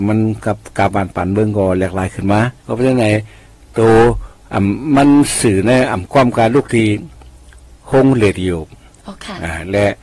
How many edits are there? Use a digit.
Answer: 1